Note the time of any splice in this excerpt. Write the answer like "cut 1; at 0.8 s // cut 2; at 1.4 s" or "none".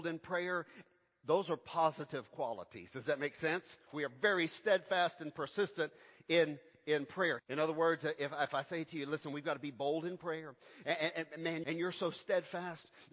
cut 1; at 3.9 s // cut 2; at 7.4 s // cut 3; at 11.6 s